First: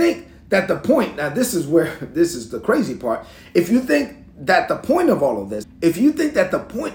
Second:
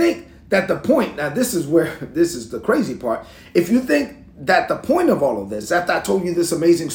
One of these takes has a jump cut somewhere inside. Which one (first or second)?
first